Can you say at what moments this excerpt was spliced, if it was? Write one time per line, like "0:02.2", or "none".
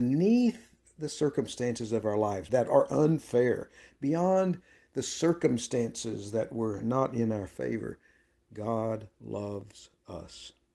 0:02.5

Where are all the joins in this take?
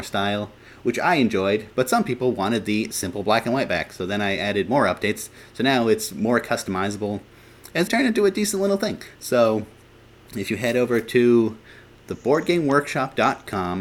0:07.9

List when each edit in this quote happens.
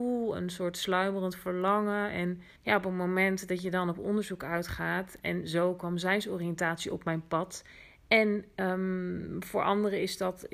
0:02.5

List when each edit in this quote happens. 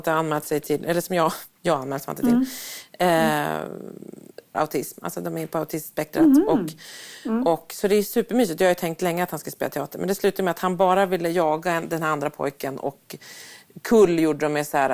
0:04.5

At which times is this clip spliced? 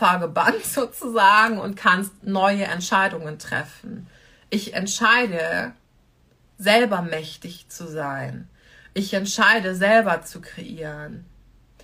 none

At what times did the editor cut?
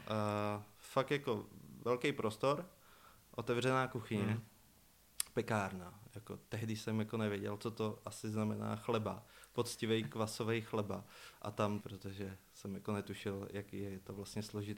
0:11.8

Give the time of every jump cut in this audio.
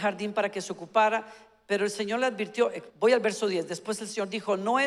0:02.9

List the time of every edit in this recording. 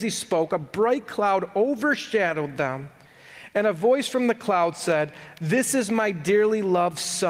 none

